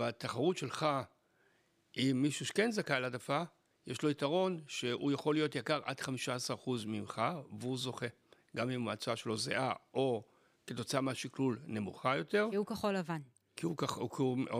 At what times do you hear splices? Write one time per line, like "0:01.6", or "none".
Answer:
none